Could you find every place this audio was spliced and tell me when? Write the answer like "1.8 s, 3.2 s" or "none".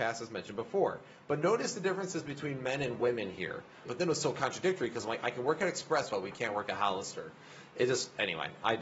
3.9 s, 6.1 s